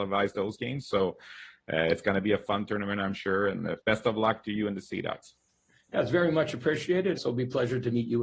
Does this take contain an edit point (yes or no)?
yes